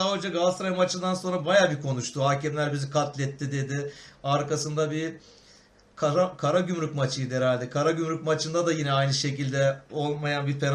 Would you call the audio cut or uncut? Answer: uncut